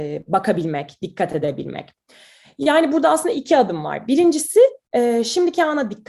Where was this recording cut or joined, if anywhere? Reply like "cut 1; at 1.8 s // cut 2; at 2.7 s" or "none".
cut 1; at 4.8 s